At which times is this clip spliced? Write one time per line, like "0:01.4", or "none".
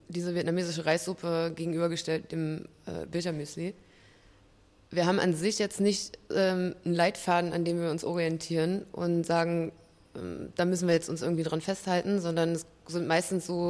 none